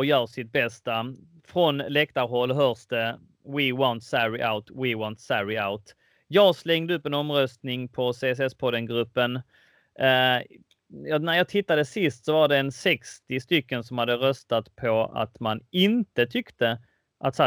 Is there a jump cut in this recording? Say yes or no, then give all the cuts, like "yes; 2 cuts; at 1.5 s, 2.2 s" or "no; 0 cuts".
no; 0 cuts